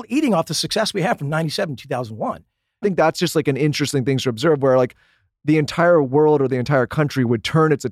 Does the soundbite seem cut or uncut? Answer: cut